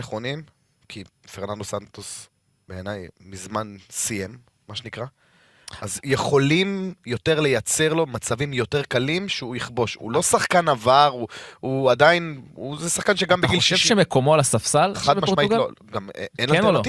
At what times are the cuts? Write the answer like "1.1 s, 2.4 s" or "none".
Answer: none

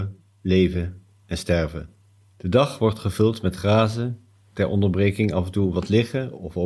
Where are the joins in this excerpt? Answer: 2.3 s

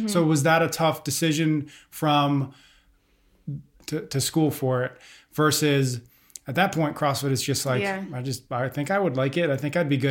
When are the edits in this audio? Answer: 3.8 s

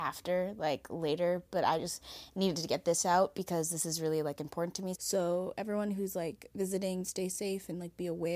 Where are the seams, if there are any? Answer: 5.0 s, 7.0 s

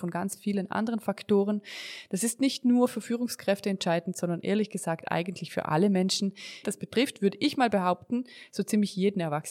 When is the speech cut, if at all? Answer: 6.6 s

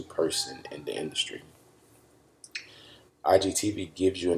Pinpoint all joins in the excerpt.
3.1 s

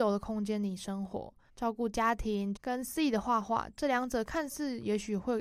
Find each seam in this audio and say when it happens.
1.5 s, 2.6 s

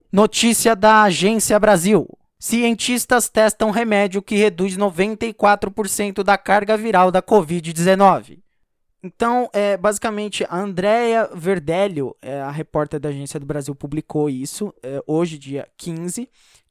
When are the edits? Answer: none

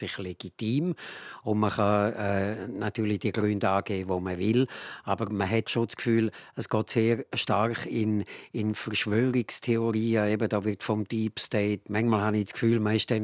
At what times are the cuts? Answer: 5.7 s, 11.9 s

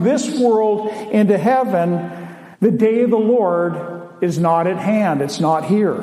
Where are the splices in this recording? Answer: 2.5 s

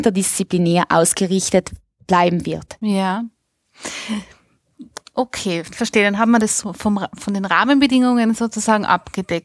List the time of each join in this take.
none

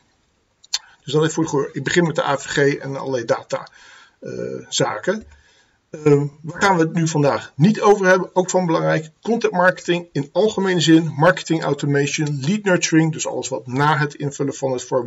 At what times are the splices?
none

